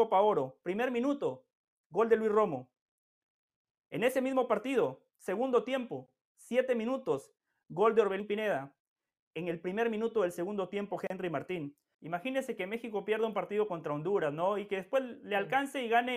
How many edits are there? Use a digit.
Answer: 2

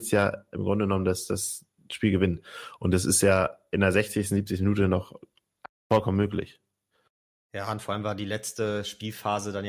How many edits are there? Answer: 0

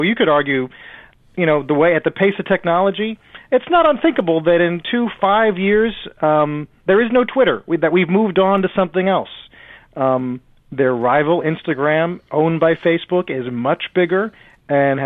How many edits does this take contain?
1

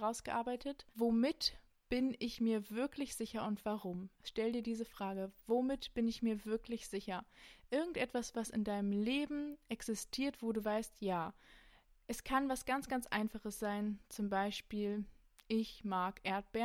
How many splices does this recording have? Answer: 1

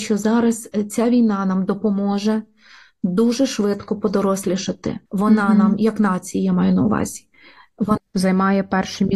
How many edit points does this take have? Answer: 2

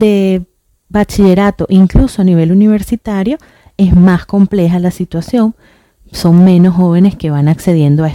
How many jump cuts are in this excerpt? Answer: 0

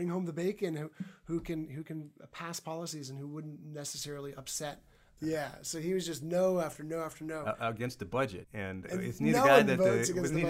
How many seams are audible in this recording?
2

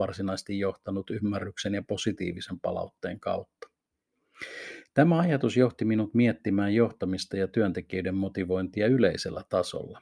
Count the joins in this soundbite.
0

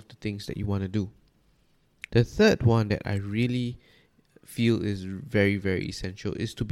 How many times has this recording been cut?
1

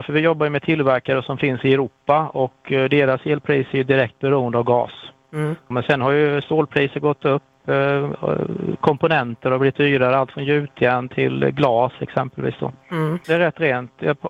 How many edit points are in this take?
2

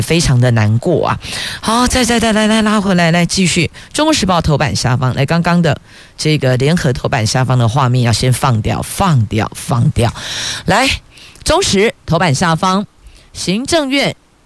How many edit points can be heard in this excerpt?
0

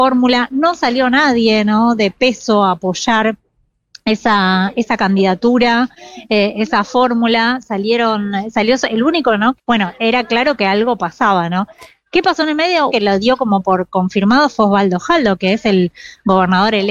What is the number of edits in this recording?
2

